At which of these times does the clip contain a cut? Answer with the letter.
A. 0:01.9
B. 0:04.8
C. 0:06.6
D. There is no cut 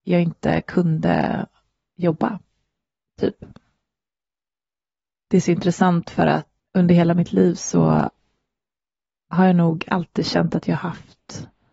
C